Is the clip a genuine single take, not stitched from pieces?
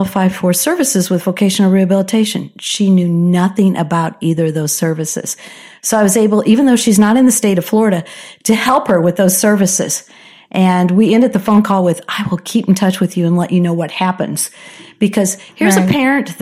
yes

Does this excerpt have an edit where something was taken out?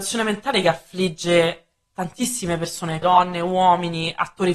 yes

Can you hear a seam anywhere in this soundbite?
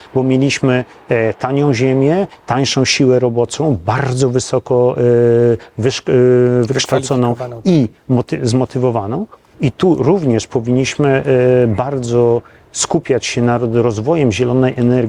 yes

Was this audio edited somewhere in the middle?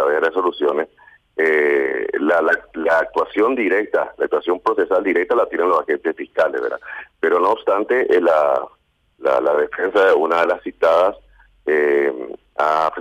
no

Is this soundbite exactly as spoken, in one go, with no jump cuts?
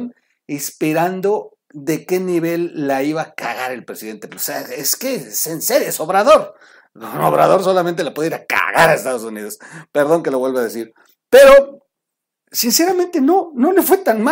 no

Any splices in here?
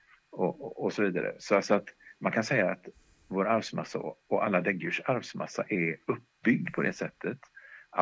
no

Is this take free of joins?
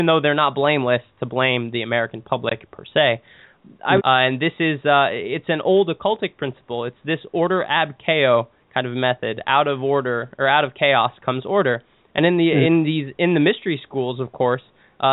no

